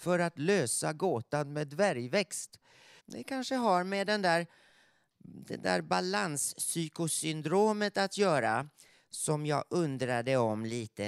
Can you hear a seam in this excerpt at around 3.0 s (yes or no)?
yes